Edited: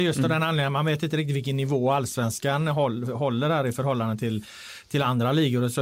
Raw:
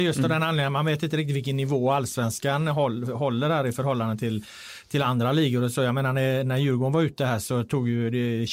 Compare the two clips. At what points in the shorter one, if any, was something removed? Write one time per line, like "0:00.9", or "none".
none